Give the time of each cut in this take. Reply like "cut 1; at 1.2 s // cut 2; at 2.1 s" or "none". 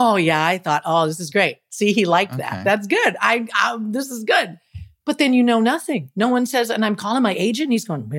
none